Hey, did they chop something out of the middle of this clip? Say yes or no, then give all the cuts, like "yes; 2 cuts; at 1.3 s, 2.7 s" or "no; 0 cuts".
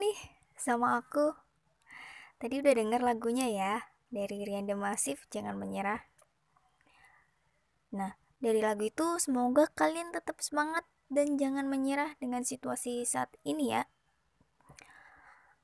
no; 0 cuts